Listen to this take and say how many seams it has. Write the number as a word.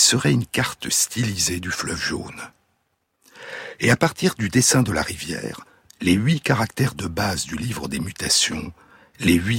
one